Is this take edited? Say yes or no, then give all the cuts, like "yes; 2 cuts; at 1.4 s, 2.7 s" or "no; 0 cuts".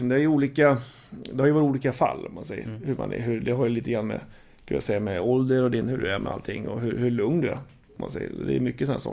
no; 0 cuts